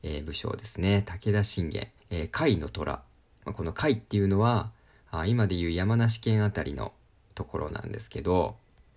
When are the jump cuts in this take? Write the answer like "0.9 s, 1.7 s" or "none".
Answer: 2.0 s